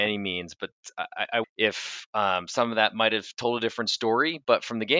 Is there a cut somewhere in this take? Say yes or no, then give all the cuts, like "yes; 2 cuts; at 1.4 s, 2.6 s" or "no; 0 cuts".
yes; 1 cut; at 1.4 s